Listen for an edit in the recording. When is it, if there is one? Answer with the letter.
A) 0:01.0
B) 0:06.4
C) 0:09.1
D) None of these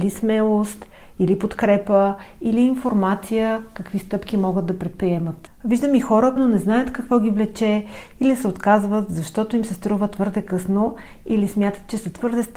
B